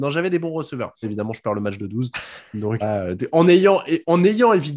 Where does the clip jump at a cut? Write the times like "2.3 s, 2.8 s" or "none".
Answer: 1.0 s, 2.8 s